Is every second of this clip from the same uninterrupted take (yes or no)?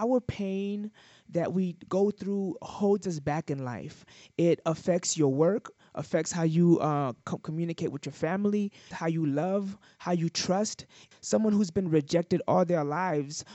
no